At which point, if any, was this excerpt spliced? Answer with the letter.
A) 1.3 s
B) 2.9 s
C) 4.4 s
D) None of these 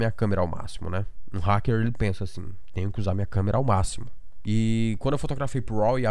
C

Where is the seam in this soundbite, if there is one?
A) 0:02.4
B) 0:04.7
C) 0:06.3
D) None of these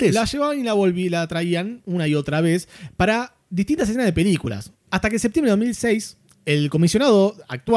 B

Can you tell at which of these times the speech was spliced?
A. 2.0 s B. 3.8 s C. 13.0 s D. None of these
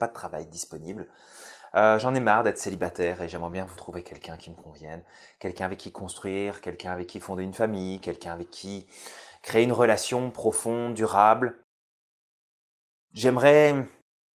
B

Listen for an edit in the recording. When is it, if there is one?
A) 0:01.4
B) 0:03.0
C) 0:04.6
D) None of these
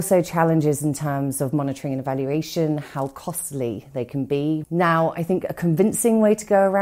C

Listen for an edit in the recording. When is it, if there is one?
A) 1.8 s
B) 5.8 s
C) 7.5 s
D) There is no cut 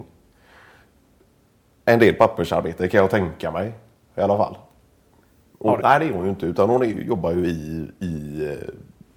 B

